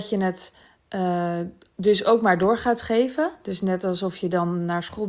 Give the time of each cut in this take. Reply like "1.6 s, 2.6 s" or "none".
none